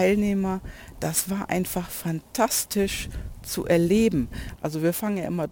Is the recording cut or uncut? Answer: cut